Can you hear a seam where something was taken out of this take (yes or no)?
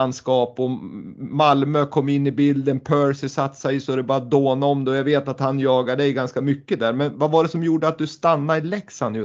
no